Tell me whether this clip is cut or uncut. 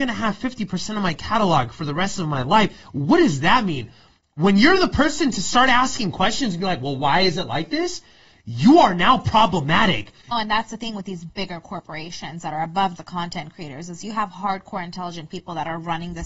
cut